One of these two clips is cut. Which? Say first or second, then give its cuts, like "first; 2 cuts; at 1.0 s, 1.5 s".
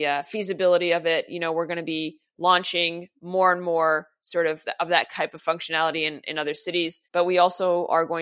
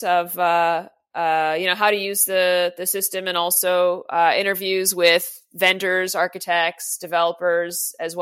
first; 1 cut; at 7.0 s